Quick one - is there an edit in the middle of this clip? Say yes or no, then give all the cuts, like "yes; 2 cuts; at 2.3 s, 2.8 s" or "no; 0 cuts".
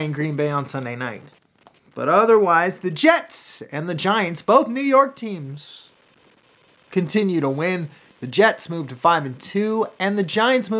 no; 0 cuts